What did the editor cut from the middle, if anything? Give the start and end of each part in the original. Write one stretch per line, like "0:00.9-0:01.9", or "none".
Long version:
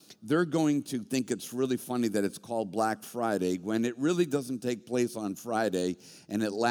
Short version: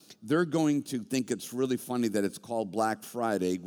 none